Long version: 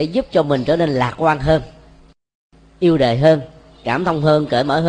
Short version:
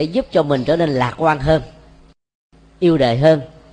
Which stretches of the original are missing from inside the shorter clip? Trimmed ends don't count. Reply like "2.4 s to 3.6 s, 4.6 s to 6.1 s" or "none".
none